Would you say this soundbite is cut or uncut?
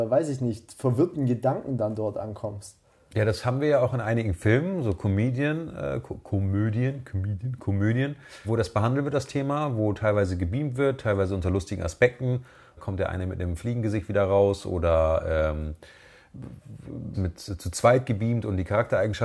cut